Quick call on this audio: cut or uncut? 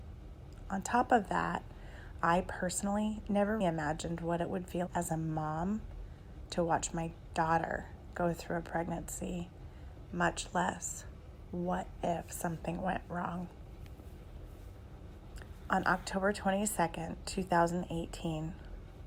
cut